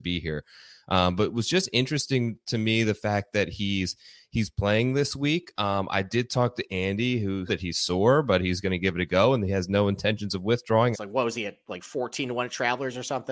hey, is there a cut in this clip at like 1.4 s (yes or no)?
no